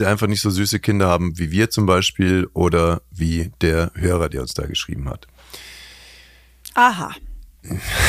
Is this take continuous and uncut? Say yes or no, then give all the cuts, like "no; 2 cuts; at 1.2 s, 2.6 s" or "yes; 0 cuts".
yes; 0 cuts